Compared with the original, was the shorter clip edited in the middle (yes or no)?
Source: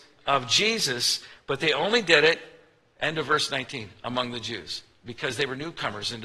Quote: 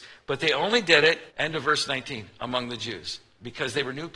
yes